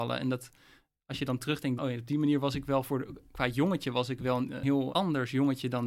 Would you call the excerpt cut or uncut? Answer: cut